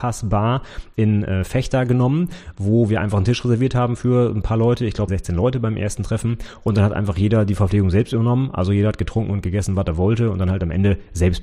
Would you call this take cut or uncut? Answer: cut